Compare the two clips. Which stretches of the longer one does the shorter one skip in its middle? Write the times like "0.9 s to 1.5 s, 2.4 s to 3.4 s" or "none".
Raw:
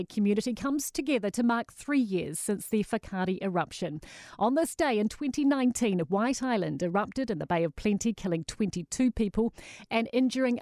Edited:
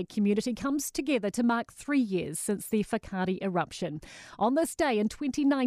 none